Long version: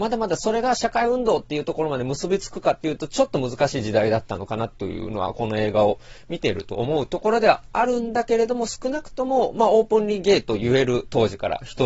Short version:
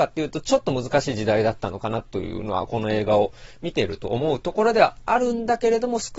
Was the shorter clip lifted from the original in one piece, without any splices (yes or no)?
yes